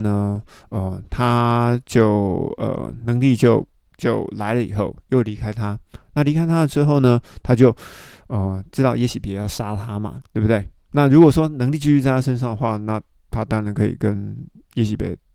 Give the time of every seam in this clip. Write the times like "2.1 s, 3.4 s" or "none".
10.2 s